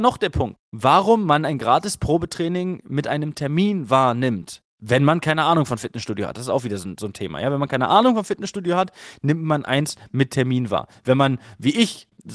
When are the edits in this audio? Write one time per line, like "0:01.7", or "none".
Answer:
none